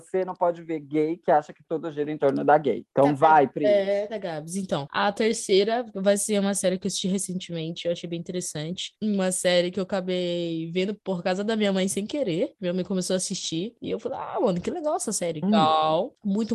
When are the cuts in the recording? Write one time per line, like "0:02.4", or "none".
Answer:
0:04.1
0:09.0
0:15.4